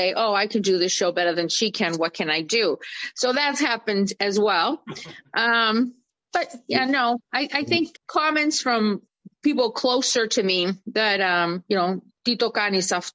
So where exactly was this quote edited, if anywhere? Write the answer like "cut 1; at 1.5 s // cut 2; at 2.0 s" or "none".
cut 1; at 7.9 s